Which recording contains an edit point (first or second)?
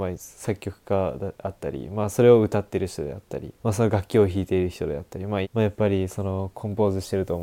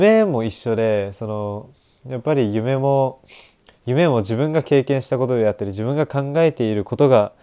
first